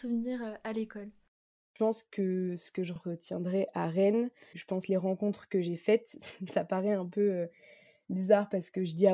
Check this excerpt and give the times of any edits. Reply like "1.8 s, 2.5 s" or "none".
4.5 s